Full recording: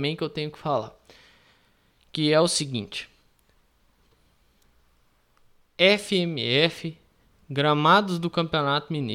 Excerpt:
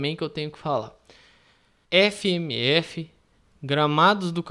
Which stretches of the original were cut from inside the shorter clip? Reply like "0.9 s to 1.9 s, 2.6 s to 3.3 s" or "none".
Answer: 1.8 s to 5.7 s